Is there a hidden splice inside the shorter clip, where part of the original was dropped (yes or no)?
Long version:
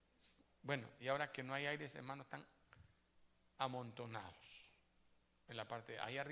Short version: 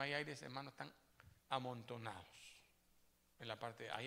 yes